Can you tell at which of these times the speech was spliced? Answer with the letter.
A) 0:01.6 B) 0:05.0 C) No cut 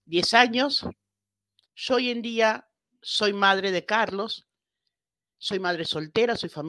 A